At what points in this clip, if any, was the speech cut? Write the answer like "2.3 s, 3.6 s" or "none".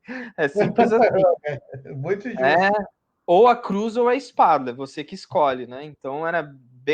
none